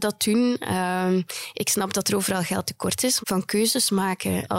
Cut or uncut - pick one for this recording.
cut